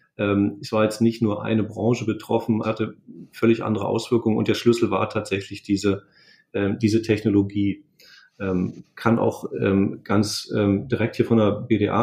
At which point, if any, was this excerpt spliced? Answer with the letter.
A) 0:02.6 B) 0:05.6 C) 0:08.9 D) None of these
A